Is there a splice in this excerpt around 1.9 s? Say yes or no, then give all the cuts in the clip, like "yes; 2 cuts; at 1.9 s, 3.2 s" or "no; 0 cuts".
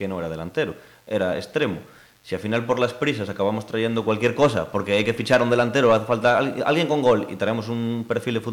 no; 0 cuts